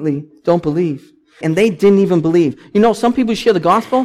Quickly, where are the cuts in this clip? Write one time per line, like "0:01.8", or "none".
0:01.4